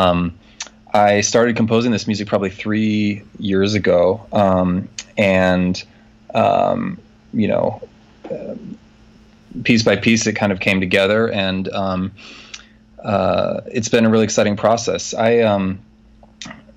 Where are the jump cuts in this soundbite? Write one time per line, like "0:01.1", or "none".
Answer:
none